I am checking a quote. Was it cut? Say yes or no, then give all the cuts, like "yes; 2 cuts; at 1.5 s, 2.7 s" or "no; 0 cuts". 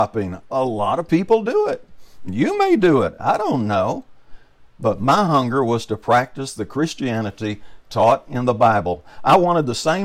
no; 0 cuts